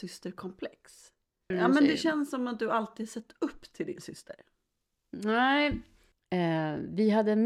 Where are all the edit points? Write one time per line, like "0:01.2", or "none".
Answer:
0:01.5
0:06.1